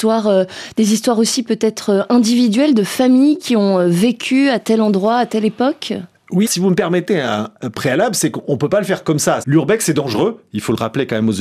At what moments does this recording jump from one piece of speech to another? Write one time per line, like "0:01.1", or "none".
0:06.5
0:09.4